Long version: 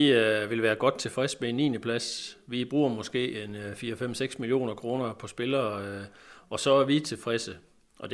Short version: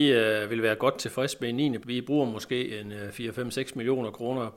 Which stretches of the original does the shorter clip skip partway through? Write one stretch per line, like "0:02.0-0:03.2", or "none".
0:01.8-0:02.4